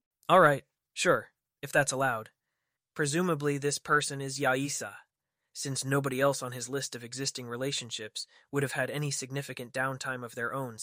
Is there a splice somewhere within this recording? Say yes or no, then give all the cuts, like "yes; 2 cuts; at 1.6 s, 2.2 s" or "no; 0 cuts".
yes; 1 cut; at 2.8 s